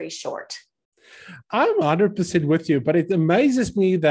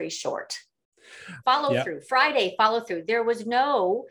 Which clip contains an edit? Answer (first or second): second